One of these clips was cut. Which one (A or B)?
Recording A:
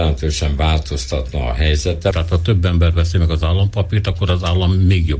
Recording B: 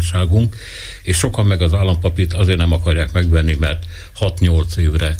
A